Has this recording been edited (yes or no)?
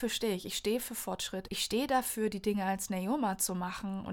yes